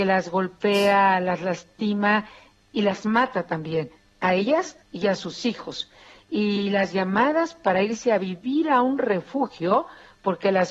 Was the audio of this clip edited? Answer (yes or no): yes